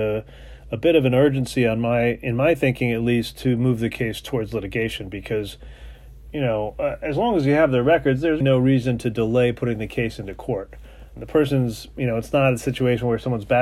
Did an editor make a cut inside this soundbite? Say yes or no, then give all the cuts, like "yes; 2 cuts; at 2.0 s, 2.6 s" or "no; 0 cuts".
yes; 2 cuts; at 8.4 s, 11.2 s